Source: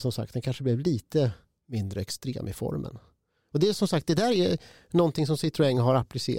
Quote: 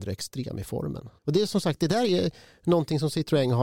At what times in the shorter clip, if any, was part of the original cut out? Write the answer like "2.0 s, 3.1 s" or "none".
1.2 s